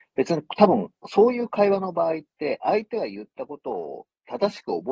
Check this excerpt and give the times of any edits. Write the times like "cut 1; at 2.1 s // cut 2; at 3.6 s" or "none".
none